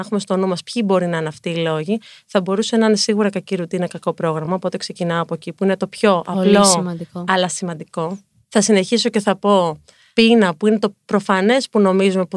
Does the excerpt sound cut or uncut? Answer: uncut